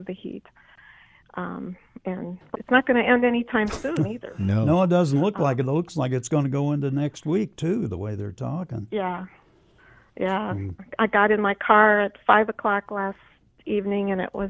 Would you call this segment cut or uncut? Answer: cut